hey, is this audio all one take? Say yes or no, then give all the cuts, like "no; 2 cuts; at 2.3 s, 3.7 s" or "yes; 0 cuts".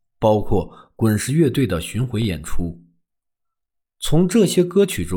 yes; 0 cuts